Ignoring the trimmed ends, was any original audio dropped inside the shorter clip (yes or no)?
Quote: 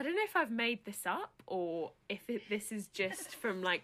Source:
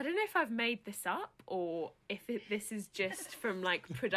no